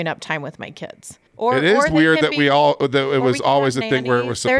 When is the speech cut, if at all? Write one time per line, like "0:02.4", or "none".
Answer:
0:01.3

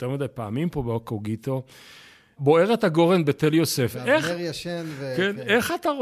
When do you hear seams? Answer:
0:02.4

